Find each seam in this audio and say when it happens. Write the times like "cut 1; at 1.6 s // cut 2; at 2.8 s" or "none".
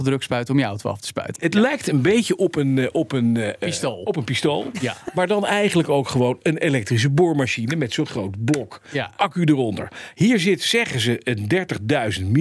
cut 1; at 1.4 s